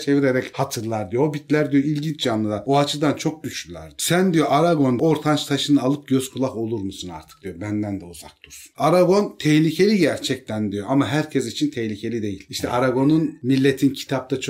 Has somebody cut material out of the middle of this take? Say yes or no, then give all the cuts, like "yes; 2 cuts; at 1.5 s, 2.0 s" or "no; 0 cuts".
yes; 1 cut; at 8.7 s